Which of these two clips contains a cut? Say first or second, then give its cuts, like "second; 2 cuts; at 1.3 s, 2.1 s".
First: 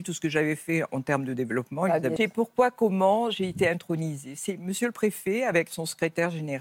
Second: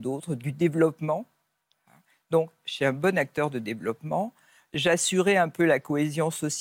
first; 1 cut; at 2.2 s